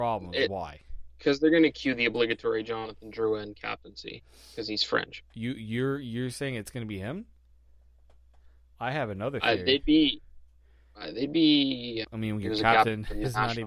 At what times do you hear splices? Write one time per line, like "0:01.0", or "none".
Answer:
0:12.0